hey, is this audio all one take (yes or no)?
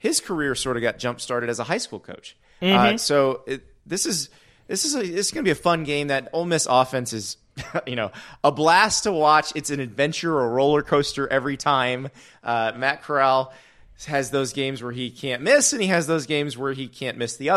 yes